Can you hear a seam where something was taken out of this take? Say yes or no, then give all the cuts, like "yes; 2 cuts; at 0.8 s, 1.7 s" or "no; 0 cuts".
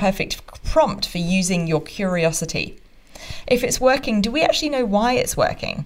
yes; 1 cut; at 3.4 s